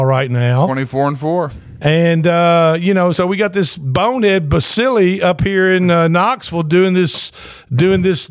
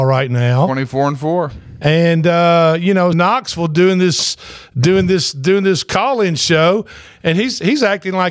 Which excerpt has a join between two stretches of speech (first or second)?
second